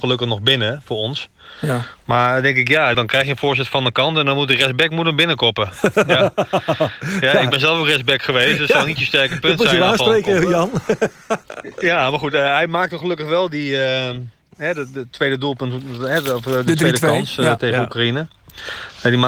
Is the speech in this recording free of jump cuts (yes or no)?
no